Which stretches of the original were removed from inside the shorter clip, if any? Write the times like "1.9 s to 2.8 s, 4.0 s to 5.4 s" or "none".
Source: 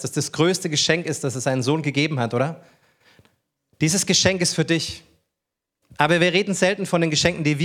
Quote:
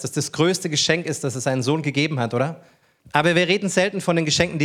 3.0 s to 5.9 s

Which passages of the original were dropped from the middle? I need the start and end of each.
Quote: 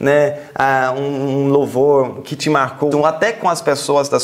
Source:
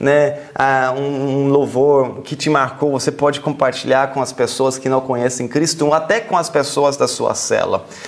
2.9 s to 5.8 s

